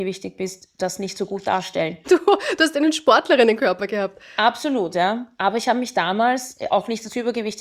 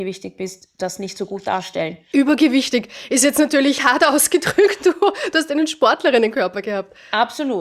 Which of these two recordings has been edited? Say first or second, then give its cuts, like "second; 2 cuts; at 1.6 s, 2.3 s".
first; 1 cut; at 2.0 s